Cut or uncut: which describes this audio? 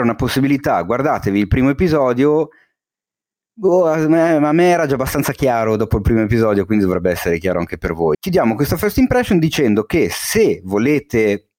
cut